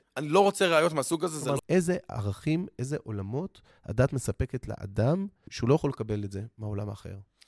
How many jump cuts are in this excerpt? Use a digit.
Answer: 1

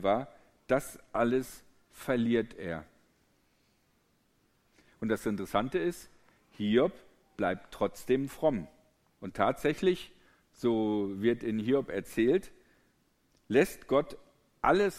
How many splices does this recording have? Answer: 1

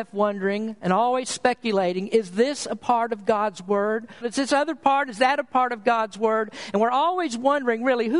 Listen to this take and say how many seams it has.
1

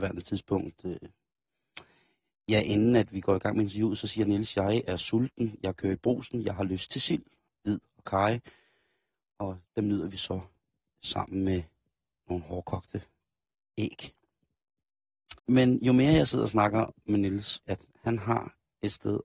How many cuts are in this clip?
3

